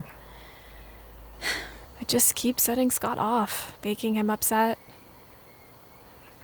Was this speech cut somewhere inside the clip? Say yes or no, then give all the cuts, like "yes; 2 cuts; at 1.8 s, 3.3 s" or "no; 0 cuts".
yes; 2 cuts; at 1.8 s, 3.8 s